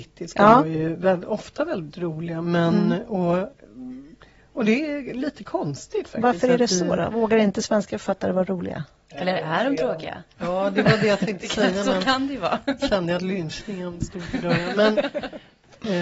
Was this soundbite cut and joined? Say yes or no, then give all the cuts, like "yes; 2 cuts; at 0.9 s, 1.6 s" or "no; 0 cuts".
no; 0 cuts